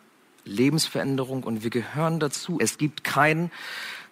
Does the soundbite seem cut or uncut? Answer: cut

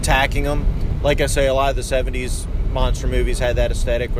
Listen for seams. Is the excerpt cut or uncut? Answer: uncut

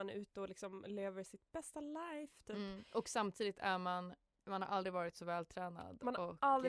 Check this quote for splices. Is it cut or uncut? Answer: uncut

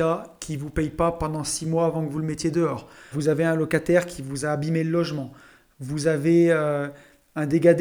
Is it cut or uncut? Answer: cut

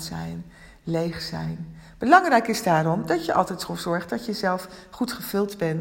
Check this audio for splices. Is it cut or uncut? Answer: uncut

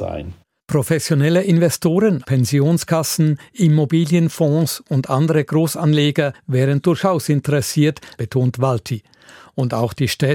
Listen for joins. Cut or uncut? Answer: cut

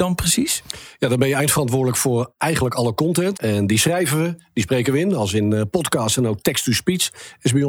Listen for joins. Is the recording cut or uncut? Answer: cut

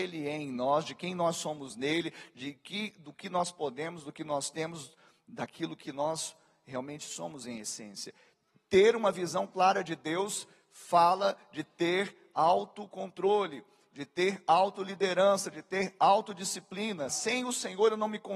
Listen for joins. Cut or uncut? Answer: cut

